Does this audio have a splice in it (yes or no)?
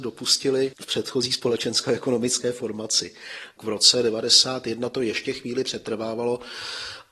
yes